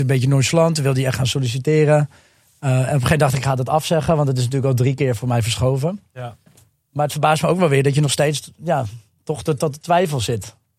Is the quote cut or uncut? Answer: uncut